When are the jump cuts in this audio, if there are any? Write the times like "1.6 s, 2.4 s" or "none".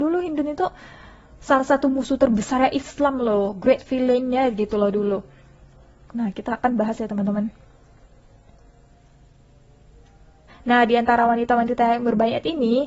6.0 s, 10.5 s